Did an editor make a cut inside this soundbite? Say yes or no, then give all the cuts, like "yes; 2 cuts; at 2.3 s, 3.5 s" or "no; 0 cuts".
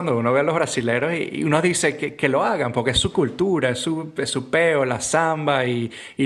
no; 0 cuts